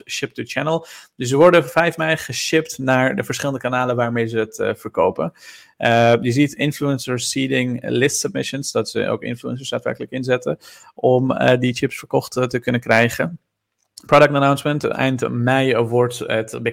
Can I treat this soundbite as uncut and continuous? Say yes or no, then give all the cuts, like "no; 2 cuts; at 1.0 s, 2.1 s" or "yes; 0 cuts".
yes; 0 cuts